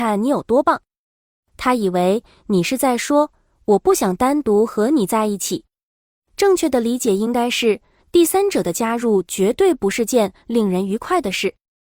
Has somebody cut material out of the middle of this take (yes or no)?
yes